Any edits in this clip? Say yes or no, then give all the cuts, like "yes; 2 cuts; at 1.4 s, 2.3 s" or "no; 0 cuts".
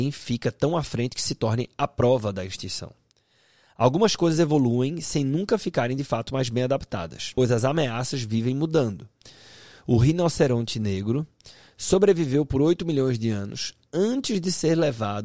no; 0 cuts